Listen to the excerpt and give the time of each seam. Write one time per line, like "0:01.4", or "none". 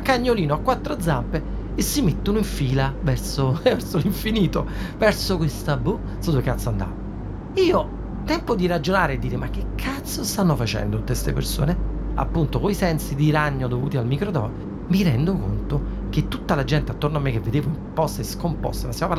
none